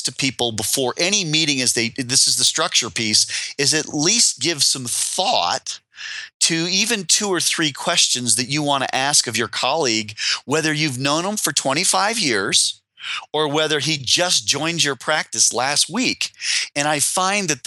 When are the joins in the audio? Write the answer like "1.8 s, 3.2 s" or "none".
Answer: 16.7 s